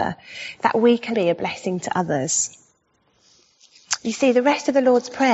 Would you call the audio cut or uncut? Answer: cut